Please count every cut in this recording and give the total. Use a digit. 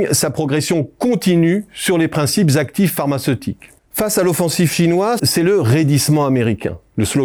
2